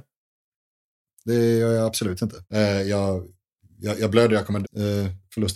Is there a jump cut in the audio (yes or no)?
yes